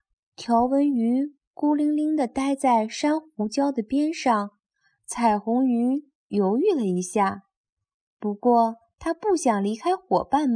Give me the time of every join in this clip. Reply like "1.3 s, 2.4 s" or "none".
5.0 s